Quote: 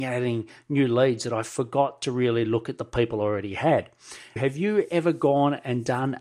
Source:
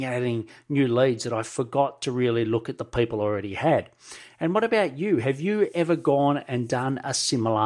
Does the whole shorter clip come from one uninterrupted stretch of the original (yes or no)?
no